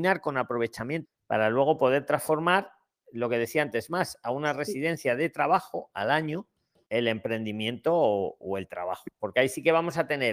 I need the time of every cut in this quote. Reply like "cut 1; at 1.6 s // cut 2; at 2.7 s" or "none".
cut 1; at 1.0 s // cut 2; at 6.9 s